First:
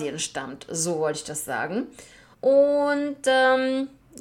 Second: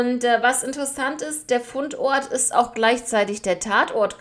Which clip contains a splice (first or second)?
first